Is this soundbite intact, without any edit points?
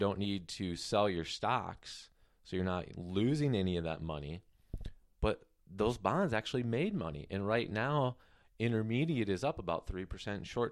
yes; 0 cuts

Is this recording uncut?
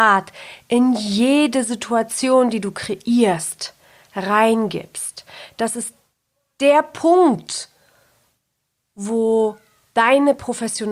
yes; 0 cuts

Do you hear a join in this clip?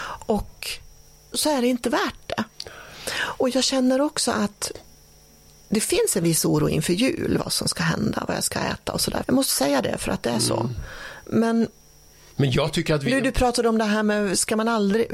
yes; 2 cuts; at 1.3 s, 9.2 s

